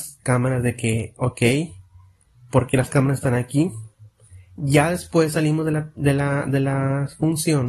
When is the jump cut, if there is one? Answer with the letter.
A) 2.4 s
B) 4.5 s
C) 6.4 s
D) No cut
D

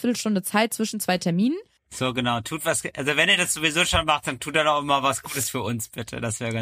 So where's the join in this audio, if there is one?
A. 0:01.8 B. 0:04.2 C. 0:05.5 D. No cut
A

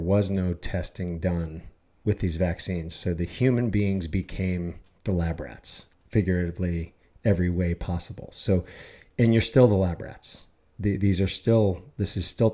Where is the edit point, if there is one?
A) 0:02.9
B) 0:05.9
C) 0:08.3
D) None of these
B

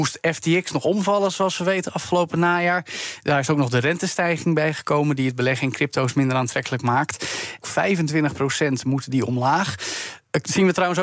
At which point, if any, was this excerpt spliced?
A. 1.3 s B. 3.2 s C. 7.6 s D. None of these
C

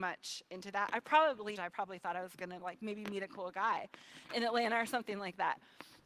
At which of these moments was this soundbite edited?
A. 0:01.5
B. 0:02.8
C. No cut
A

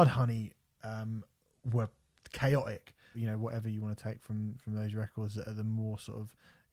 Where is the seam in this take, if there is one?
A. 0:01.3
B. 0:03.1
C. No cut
B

